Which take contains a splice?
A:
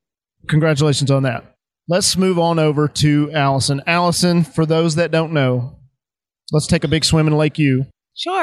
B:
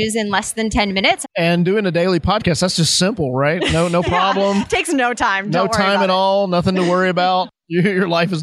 B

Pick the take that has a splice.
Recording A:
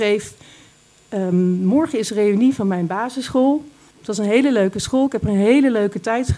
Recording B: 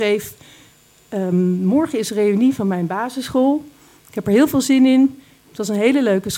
A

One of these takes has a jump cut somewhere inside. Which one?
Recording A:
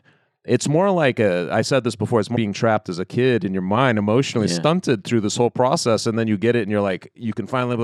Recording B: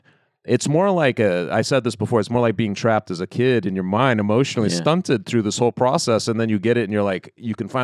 A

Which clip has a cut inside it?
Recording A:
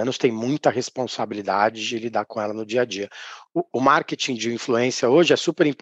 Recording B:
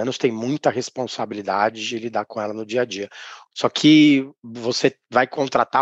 B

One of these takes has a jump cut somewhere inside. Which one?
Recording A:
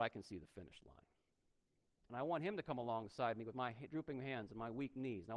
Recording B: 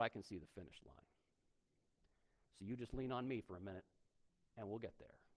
A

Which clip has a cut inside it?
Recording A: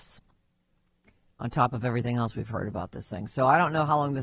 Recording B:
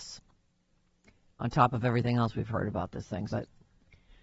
B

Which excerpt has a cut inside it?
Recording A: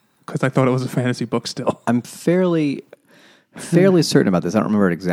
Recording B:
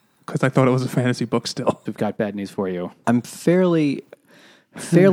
B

